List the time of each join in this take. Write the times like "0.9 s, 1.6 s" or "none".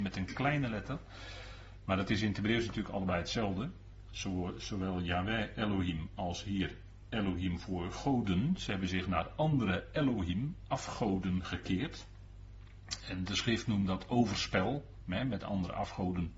none